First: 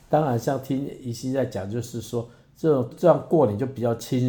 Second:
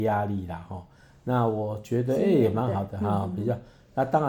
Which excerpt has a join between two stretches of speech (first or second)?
first